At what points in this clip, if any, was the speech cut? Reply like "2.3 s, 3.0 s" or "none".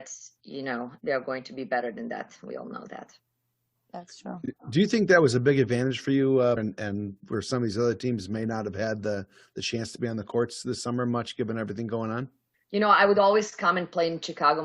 6.6 s, 12.5 s